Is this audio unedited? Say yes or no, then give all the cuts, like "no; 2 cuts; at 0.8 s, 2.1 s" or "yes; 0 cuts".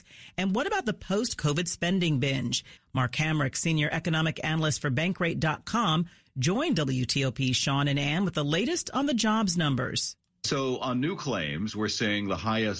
no; 1 cut; at 2.8 s